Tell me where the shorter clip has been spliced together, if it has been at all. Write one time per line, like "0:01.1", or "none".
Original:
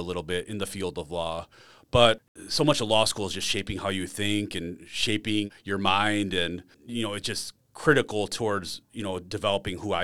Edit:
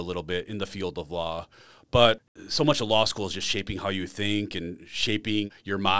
none